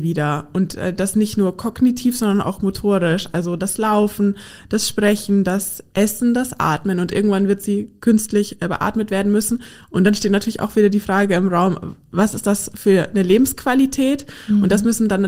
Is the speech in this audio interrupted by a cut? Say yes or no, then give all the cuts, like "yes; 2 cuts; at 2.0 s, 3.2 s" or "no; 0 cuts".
no; 0 cuts